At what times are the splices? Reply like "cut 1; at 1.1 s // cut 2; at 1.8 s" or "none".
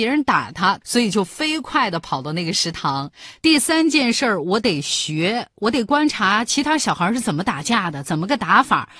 none

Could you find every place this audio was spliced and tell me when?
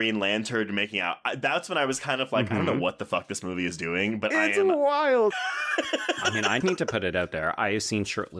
cut 1; at 5.3 s // cut 2; at 6.6 s

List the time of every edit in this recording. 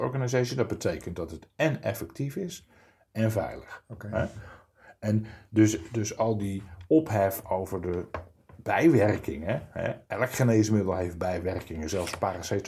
none

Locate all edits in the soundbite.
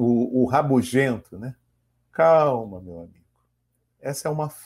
cut 1; at 1.9 s

